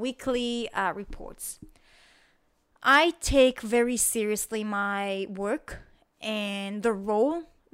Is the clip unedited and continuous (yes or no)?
yes